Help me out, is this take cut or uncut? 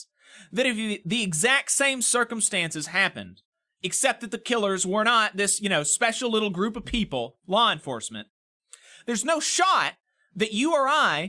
uncut